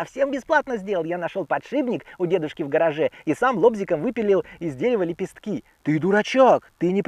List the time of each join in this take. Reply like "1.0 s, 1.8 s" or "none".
none